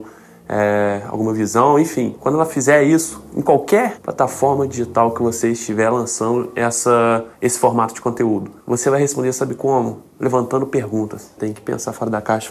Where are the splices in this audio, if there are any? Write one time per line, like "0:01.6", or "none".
0:08.6
0:11.4